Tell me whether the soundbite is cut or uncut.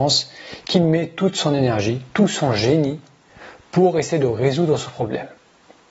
uncut